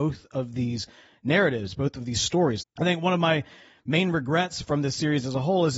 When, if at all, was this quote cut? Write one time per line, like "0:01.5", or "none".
0:02.6